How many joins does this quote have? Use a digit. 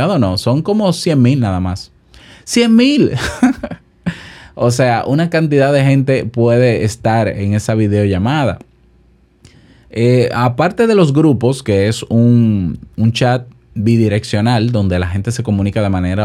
0